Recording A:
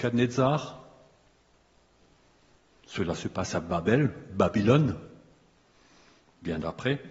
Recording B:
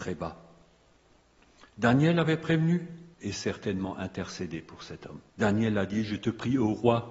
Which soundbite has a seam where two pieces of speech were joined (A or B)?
B